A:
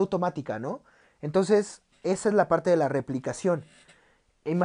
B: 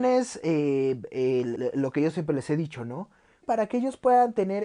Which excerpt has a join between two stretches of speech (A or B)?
B